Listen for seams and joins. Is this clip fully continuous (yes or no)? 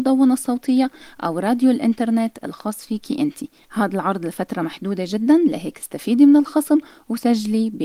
no